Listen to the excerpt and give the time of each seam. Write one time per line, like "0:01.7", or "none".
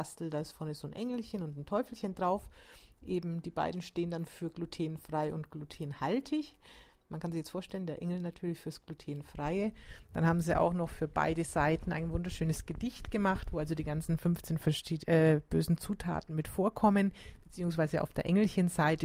none